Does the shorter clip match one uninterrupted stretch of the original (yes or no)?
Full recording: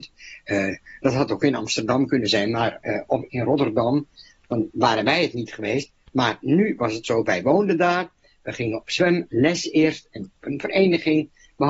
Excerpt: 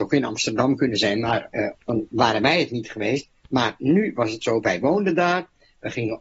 no